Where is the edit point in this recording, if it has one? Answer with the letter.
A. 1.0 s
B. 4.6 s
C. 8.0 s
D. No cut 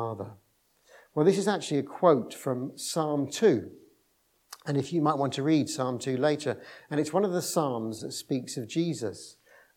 C